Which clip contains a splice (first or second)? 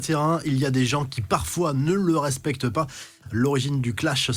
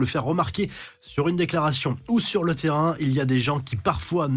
first